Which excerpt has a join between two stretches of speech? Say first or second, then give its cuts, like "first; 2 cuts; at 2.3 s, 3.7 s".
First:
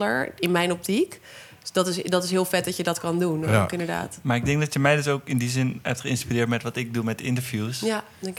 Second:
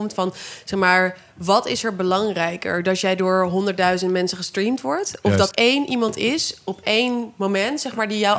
second; 1 cut; at 5.5 s